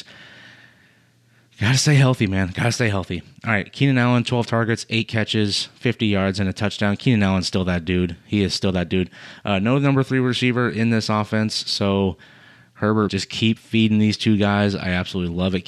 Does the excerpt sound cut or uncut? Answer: cut